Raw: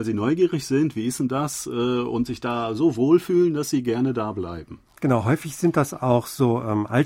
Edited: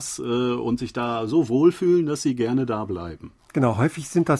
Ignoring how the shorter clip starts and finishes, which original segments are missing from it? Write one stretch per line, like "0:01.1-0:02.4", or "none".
none